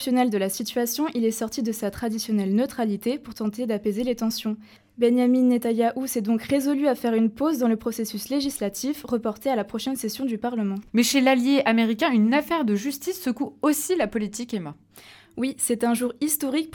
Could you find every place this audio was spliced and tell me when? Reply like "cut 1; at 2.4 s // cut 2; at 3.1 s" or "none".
cut 1; at 10.9 s